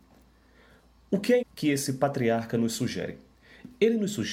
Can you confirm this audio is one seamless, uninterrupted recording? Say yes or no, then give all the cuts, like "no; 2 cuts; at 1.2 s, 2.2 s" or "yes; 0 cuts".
no; 1 cut; at 1.4 s